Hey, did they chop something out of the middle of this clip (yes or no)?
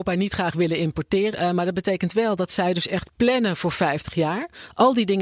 yes